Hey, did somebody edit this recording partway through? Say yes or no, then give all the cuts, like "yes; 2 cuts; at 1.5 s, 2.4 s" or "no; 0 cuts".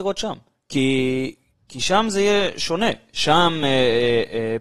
no; 0 cuts